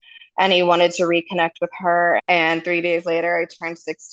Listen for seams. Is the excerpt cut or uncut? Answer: cut